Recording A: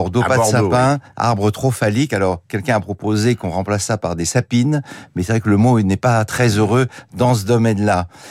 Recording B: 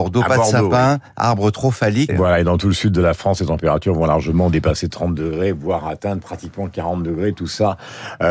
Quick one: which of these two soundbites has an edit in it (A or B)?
B